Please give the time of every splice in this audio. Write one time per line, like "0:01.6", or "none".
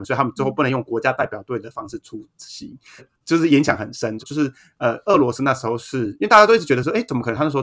0:03.0
0:04.2